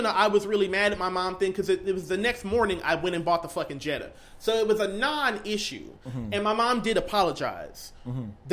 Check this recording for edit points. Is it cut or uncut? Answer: uncut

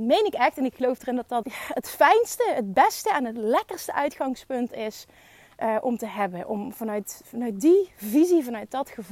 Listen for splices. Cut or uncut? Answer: cut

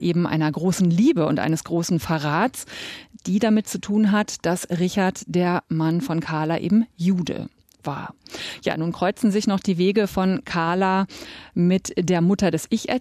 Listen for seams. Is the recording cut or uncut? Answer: uncut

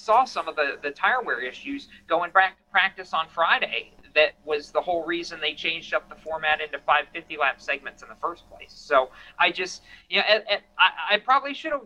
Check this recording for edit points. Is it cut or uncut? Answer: uncut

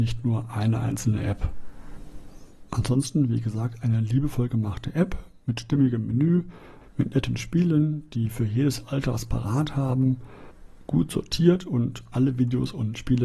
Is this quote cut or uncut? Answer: cut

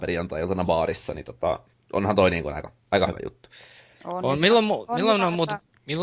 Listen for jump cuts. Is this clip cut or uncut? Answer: uncut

